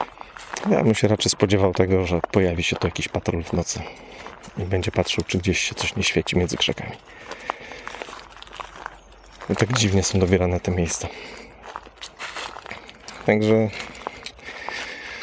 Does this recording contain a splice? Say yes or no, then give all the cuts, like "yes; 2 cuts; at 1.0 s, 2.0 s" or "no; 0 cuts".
no; 0 cuts